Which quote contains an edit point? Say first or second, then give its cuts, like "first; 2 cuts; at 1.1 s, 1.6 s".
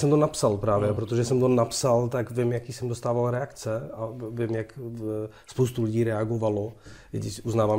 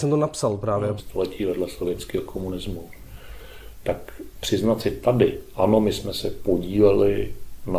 second; 1 cut; at 1.0 s